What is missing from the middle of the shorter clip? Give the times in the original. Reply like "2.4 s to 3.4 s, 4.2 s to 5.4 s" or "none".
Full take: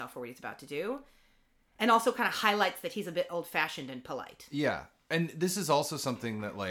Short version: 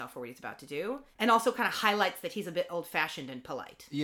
1.1 s to 1.7 s